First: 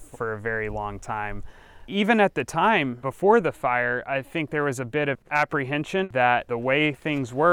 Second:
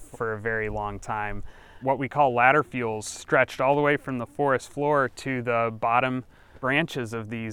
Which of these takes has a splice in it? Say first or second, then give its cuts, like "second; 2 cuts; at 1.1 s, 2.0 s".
second; 1 cut; at 1.8 s